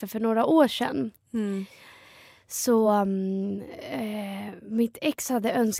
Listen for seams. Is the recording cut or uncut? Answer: uncut